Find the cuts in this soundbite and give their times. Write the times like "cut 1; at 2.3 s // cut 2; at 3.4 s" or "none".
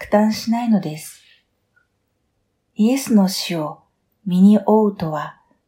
none

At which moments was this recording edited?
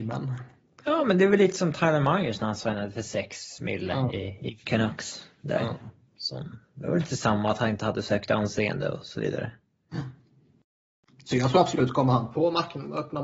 cut 1; at 4.6 s

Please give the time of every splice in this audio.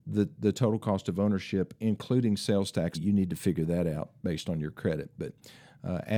cut 1; at 2.9 s

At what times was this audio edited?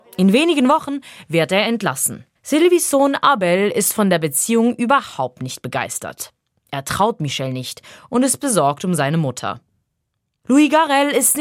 cut 1; at 2.4 s

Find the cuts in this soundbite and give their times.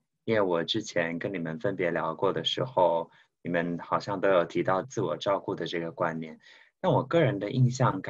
cut 1; at 4.8 s

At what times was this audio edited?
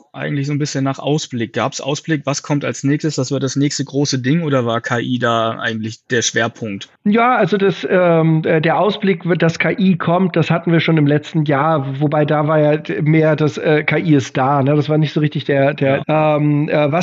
cut 1; at 7.0 s // cut 2; at 16.0 s

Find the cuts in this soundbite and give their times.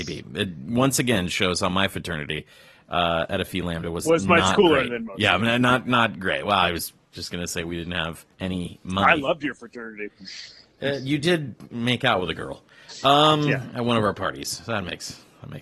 cut 1; at 8.3 s

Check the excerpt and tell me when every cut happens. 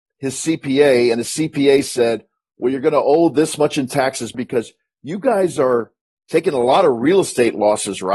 cut 1; at 4.3 s

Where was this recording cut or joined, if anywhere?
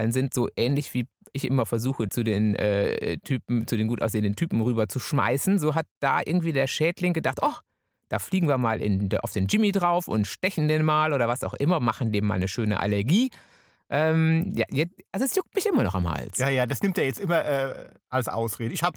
cut 1; at 2.1 s

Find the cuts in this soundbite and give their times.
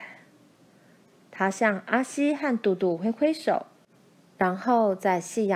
none

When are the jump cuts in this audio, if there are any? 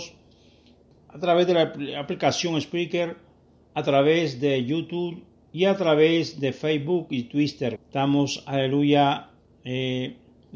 cut 1; at 0.9 s // cut 2; at 7.8 s

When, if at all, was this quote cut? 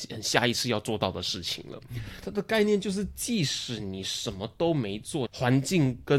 cut 1; at 2.2 s // cut 2; at 5.3 s

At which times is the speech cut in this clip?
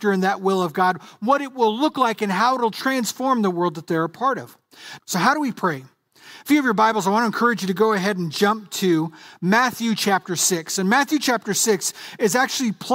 cut 1; at 5.0 s

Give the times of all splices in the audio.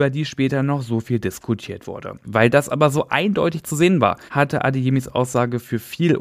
cut 1; at 2.2 s // cut 2; at 4.3 s

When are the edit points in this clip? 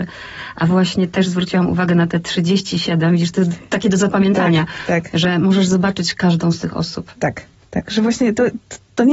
none

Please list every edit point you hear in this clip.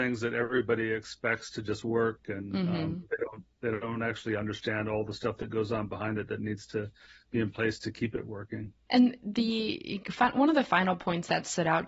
none

